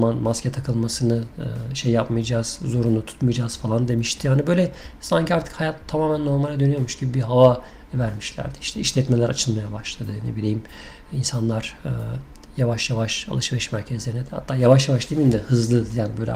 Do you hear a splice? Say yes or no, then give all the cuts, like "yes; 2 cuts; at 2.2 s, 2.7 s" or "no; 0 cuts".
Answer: no; 0 cuts